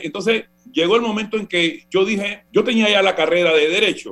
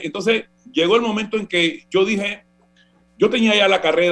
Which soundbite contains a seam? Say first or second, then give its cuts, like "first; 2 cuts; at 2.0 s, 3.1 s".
first; 1 cut; at 2.5 s